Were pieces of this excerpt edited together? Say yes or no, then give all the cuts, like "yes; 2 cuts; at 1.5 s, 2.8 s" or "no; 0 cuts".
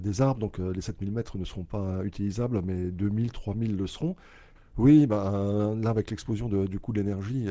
yes; 1 cut; at 4.6 s